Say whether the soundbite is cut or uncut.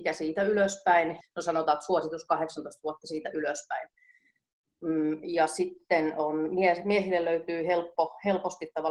cut